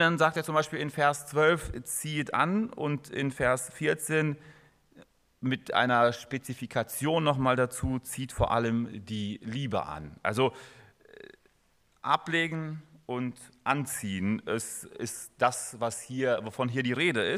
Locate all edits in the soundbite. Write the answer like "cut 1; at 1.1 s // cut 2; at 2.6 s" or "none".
none